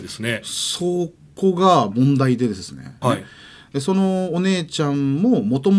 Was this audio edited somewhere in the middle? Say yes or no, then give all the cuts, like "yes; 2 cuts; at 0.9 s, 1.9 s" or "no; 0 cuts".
yes; 1 cut; at 3.0 s